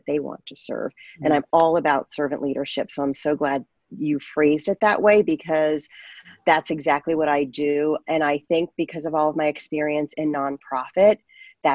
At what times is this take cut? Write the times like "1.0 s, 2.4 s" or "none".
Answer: none